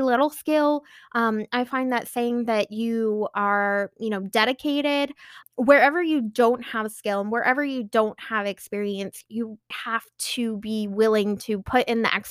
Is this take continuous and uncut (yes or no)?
no